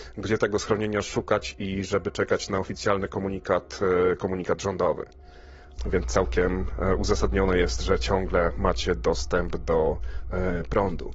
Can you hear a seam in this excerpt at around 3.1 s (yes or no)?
no